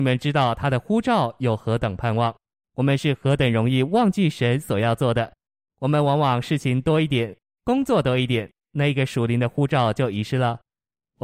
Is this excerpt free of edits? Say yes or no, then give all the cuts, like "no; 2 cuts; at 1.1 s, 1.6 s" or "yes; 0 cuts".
no; 1 cut; at 2.6 s